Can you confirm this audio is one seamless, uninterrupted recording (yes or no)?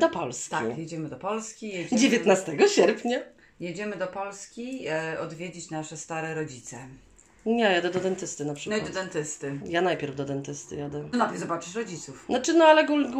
no